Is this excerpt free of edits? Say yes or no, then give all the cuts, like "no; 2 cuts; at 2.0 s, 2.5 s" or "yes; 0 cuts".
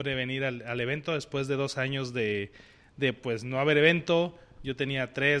yes; 0 cuts